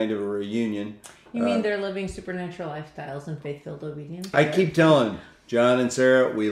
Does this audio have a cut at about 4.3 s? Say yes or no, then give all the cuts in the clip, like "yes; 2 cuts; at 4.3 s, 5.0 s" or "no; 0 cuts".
yes; 1 cut; at 4.3 s